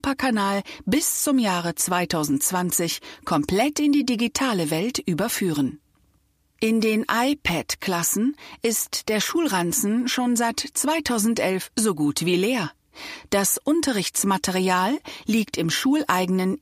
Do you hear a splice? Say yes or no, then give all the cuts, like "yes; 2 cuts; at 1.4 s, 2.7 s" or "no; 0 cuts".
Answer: no; 0 cuts